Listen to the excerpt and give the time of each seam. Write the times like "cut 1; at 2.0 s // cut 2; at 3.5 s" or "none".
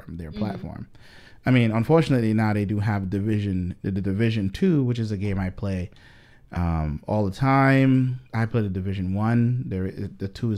cut 1; at 8.3 s